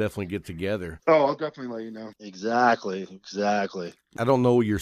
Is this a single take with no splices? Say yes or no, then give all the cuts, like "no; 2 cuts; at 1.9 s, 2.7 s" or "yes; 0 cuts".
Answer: no; 1 cut; at 2.1 s